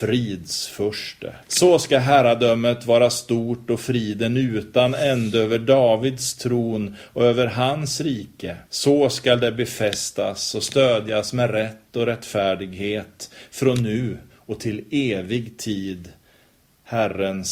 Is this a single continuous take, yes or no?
no